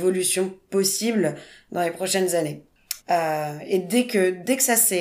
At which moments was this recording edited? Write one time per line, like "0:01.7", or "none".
0:03.0